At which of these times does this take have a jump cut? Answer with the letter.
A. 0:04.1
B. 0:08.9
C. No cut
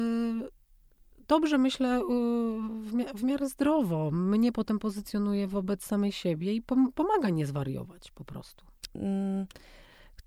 B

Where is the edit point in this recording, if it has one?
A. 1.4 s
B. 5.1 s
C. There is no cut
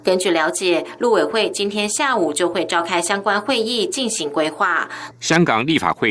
B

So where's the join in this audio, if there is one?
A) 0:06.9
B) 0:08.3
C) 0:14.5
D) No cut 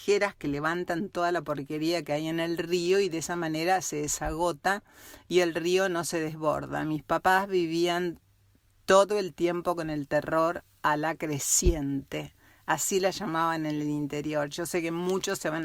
D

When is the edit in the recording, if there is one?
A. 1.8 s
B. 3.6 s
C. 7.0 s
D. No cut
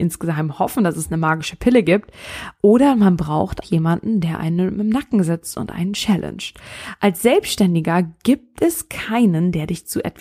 B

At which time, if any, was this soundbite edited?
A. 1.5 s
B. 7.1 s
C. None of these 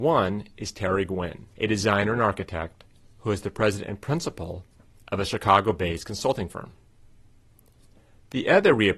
A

